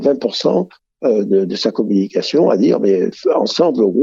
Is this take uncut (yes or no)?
yes